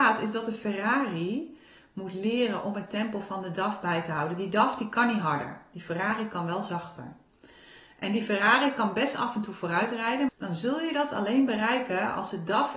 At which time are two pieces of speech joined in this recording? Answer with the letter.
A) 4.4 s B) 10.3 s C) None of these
B